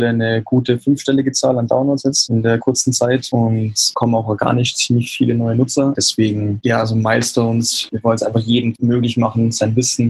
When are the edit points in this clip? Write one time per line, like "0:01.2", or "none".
0:06.0
0:07.9